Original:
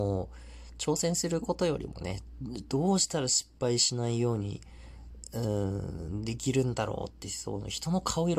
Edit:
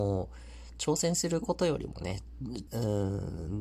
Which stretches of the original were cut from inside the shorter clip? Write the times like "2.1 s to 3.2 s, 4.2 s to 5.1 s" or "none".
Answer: 2.7 s to 5.3 s